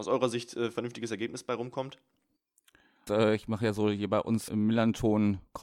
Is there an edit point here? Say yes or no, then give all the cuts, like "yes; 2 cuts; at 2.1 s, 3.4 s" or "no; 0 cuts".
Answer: yes; 2 cuts; at 3.1 s, 4.5 s